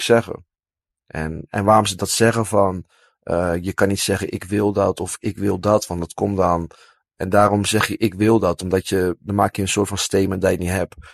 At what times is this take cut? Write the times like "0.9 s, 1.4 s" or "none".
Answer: 7.0 s